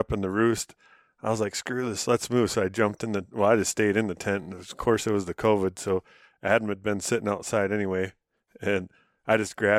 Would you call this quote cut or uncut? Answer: uncut